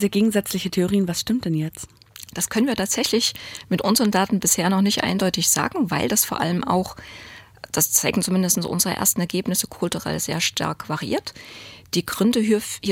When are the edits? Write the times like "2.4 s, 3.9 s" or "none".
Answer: none